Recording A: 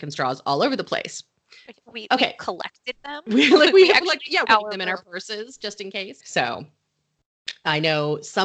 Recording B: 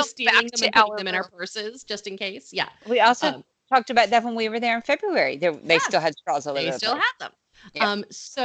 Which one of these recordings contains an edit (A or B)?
A